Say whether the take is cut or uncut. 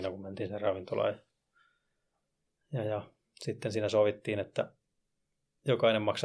uncut